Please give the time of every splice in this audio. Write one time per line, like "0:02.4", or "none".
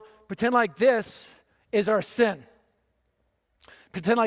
none